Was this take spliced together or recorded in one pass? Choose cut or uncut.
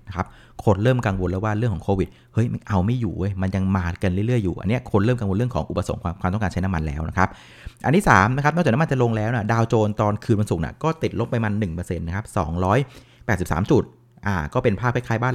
uncut